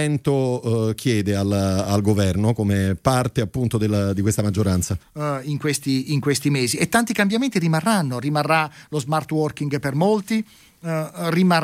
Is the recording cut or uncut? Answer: cut